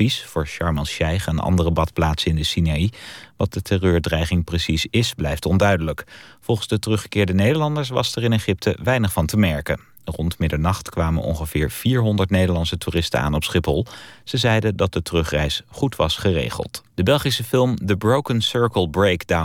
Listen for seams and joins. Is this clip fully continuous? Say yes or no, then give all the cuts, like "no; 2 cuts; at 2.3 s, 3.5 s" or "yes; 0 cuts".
no; 1 cut; at 16.9 s